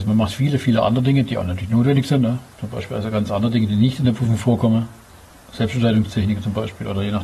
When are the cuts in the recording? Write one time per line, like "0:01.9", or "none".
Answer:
none